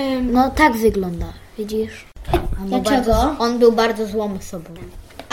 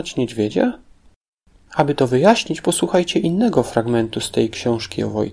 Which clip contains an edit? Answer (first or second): first